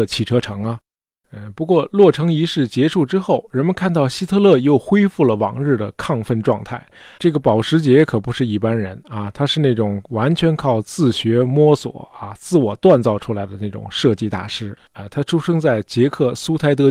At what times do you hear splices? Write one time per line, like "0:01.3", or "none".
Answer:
0:07.2
0:14.9

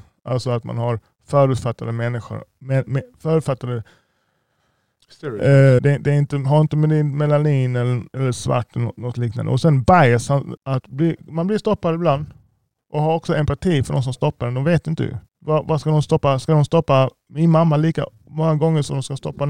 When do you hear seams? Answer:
0:05.8
0:10.6
0:15.3

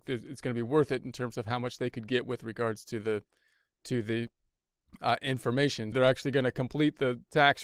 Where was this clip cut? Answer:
0:05.9

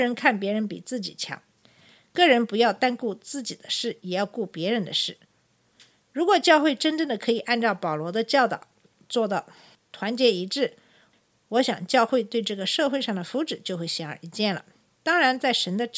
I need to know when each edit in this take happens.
none

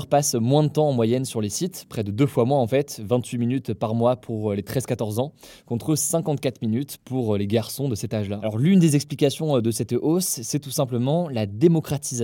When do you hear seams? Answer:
none

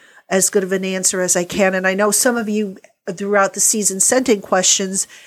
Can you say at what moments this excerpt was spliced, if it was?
none

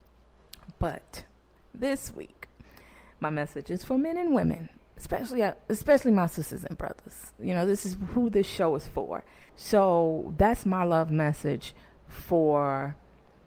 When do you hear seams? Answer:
0:09.5

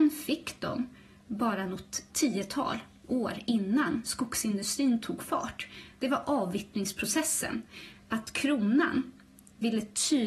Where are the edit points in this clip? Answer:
0:02.1

